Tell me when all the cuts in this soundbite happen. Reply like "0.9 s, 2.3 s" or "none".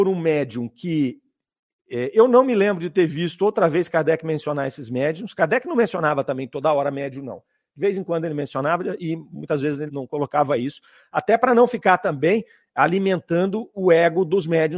9.9 s